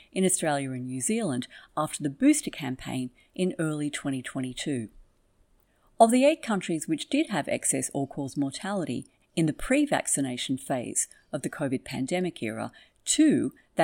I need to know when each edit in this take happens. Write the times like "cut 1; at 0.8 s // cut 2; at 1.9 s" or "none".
none

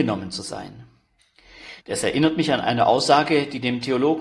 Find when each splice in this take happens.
cut 1; at 1.8 s

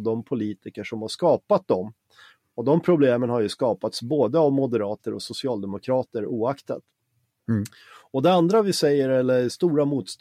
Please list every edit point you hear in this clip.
none

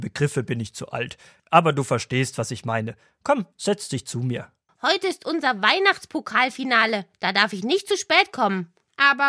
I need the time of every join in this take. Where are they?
cut 1; at 4.7 s

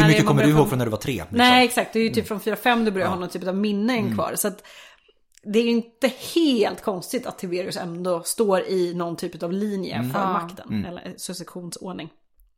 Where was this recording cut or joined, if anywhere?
none

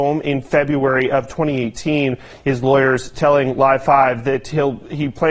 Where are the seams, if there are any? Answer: cut 1; at 2.3 s

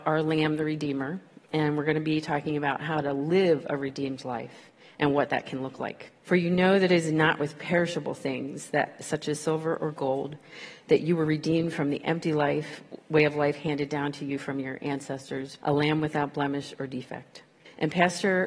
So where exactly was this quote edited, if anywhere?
cut 1; at 6.2 s // cut 2; at 15.6 s

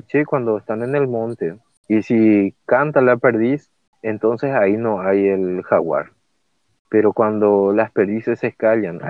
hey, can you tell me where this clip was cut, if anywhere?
none

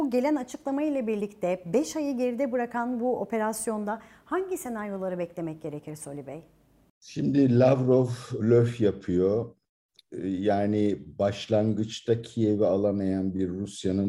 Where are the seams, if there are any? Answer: cut 1; at 8.4 s

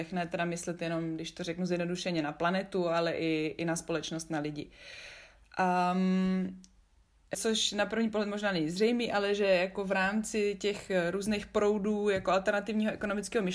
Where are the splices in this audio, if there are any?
cut 1; at 7.3 s

